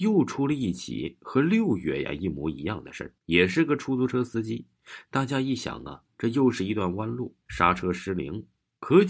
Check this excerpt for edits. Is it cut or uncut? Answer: cut